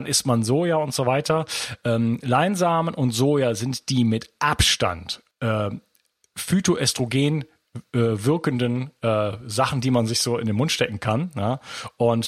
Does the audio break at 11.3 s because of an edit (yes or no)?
no